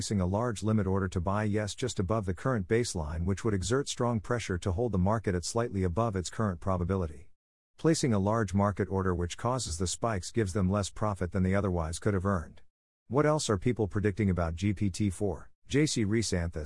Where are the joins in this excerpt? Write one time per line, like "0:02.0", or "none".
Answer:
0:15.6